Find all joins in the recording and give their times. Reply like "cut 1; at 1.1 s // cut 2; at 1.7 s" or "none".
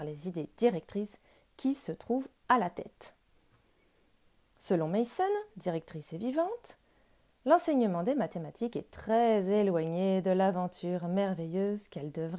cut 1; at 5.5 s